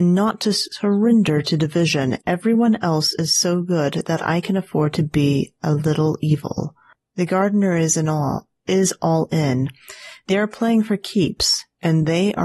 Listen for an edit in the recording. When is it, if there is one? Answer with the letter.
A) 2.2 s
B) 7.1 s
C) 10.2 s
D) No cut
A